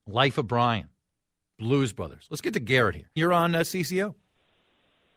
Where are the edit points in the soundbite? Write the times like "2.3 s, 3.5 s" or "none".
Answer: 1.5 s, 3.2 s